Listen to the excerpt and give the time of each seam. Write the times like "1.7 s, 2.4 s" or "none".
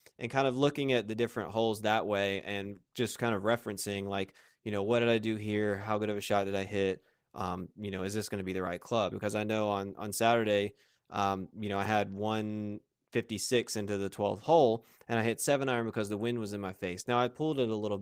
9.1 s